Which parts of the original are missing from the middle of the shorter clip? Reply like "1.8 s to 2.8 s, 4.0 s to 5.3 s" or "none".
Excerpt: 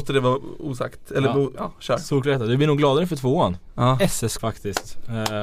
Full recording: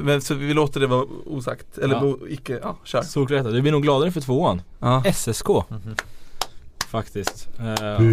2.2 s to 2.6 s, 5.4 s to 6.9 s